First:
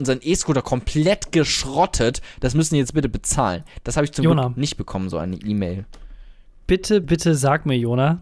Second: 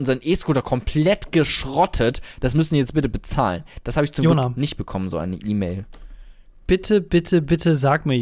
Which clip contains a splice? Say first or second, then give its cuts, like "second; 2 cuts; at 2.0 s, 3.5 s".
first; 1 cut; at 7.0 s